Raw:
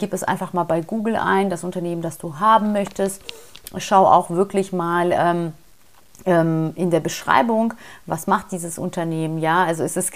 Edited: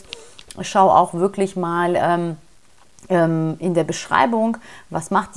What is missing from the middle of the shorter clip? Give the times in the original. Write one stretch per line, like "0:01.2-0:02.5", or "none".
none